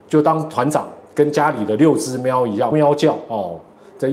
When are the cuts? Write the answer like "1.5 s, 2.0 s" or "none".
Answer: 2.7 s